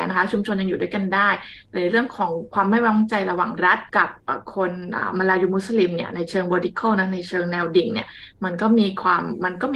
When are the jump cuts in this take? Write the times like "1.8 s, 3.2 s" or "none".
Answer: 3.9 s